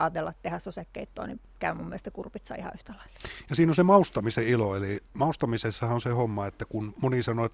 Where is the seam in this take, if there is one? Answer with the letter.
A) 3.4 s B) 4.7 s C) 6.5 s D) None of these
D